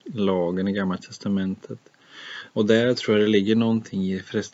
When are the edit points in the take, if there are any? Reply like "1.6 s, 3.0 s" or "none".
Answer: 2.5 s